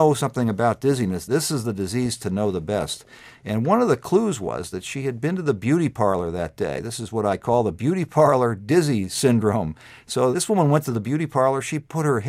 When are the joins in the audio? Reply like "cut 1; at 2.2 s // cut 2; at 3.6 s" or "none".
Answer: cut 1; at 10.3 s